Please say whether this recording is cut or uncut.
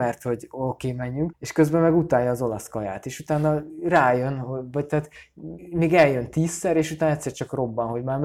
cut